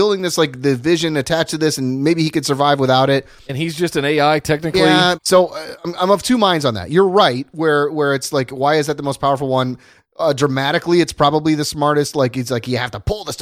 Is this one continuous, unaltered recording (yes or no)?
no